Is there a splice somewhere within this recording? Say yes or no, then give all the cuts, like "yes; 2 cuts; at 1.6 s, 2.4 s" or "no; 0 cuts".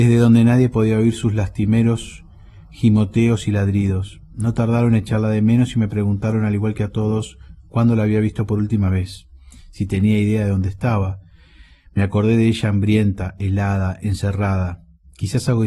no; 0 cuts